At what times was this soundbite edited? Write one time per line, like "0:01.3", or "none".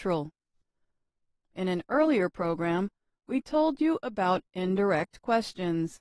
0:01.4